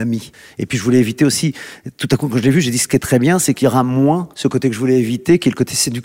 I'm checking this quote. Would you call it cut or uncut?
cut